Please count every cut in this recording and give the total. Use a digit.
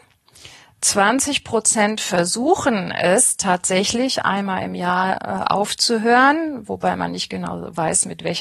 0